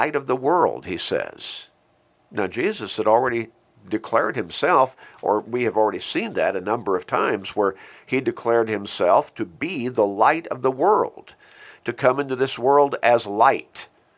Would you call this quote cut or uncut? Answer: uncut